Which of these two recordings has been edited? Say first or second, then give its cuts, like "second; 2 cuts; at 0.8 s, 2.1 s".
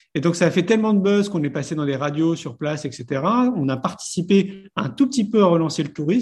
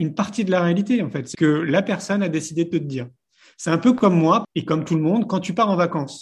second; 2 cuts; at 1.3 s, 4.4 s